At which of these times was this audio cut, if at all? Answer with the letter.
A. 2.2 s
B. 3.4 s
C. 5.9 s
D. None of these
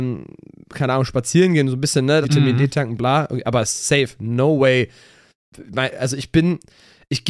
A